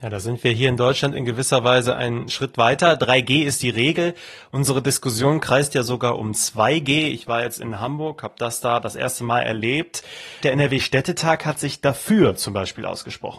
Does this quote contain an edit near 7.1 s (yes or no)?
no